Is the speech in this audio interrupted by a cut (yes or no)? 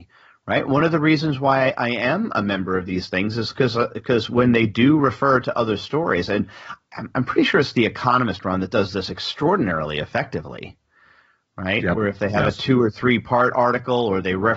no